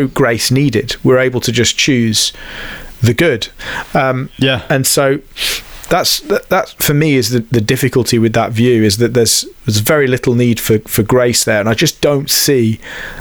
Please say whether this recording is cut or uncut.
uncut